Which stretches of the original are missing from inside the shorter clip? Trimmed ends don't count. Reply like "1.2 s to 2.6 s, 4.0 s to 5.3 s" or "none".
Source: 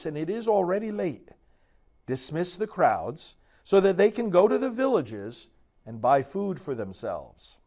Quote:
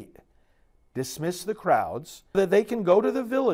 3.5 s to 3.8 s